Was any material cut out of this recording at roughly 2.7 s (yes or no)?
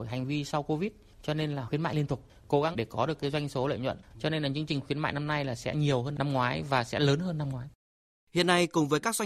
yes